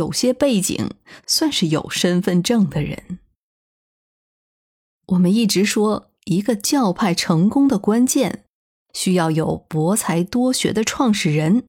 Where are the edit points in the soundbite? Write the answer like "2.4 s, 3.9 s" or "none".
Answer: none